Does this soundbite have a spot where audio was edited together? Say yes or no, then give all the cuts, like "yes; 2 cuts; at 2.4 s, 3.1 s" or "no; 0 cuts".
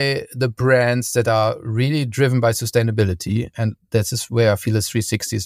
no; 0 cuts